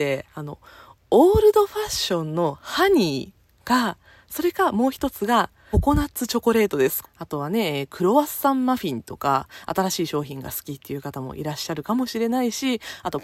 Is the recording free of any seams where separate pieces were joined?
no; 2 cuts; at 5.7 s, 7.0 s

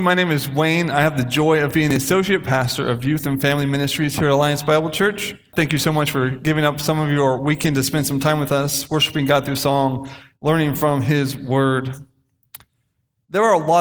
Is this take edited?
yes; 1 cut; at 5.5 s

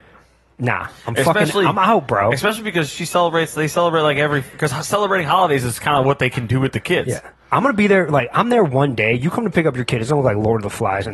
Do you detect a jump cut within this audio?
no; 0 cuts

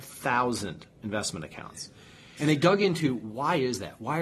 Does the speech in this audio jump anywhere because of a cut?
yes; 1 cut; at 2.4 s

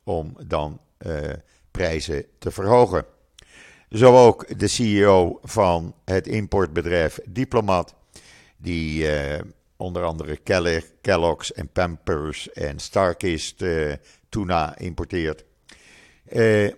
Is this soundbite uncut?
yes; 0 cuts

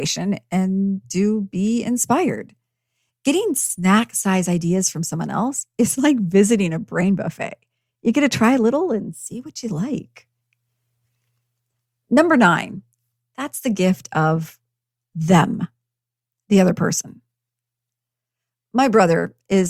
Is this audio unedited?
yes; 0 cuts

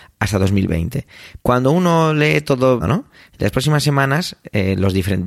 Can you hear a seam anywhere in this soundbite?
yes; 2 cuts; at 1.4 s, 2.8 s

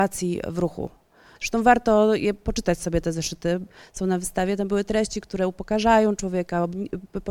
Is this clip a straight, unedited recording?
no; 1 cut; at 1.4 s

